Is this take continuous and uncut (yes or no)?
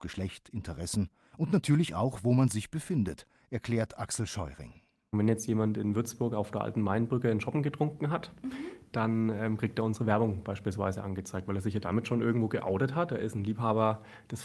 yes